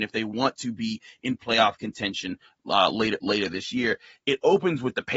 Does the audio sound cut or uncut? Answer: uncut